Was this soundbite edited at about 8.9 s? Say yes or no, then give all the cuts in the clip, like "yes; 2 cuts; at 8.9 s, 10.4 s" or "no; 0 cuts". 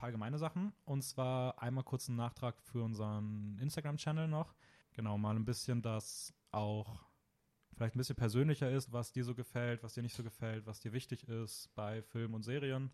yes; 2 cuts; at 4.8 s, 8.9 s